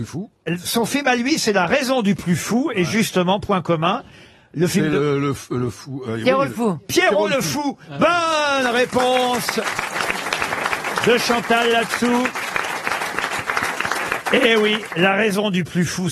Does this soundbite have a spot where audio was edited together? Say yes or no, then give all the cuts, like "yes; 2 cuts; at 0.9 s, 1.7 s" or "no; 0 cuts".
no; 0 cuts